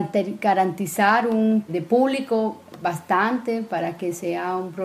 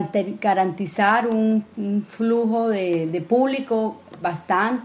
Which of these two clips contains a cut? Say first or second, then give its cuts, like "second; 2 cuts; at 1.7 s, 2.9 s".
first; 1 cut; at 1.7 s